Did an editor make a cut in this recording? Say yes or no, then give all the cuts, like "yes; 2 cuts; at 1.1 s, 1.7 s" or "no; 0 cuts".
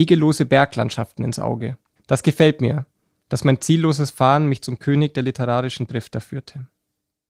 yes; 1 cut; at 2.0 s